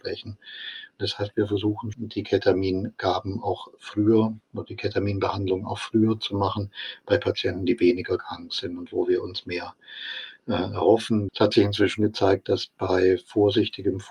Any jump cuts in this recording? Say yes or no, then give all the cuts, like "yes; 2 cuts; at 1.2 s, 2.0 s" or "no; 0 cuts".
yes; 2 cuts; at 1.9 s, 11.3 s